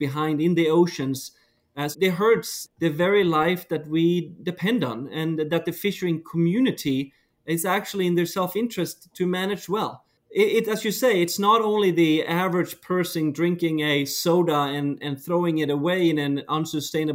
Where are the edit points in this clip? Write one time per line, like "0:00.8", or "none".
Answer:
0:01.9